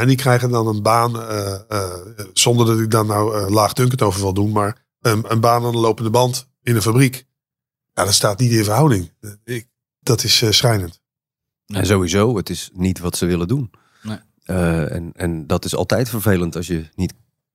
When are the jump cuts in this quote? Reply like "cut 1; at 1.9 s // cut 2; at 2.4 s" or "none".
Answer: cut 1; at 10.0 s